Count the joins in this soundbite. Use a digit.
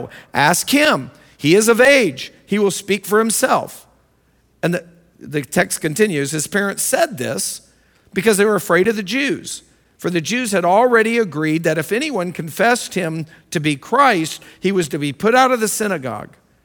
0